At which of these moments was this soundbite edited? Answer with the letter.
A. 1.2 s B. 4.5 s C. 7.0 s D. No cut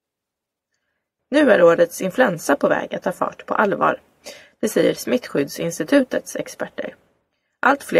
A